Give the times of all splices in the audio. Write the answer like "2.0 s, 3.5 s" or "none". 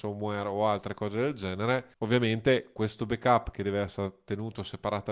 1.9 s